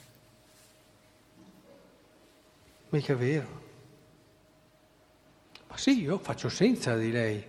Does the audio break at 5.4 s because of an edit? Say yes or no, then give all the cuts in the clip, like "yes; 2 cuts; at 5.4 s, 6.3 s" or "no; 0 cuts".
no; 1 cut; at 2.8 s